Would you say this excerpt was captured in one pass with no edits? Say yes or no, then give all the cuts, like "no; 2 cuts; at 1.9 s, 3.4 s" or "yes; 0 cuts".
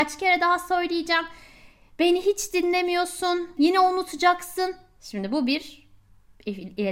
no; 1 cut; at 3.6 s